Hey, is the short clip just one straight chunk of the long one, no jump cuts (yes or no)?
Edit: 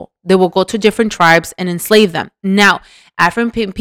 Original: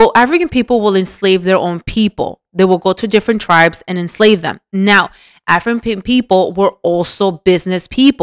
yes